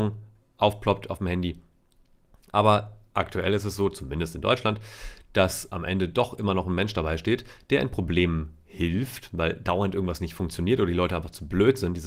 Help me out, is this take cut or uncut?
uncut